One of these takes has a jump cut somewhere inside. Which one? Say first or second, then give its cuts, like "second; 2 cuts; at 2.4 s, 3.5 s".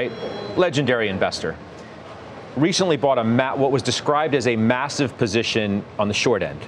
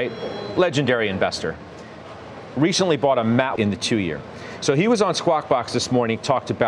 second; 1 cut; at 3.6 s